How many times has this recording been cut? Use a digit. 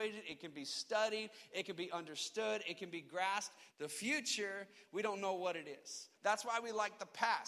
2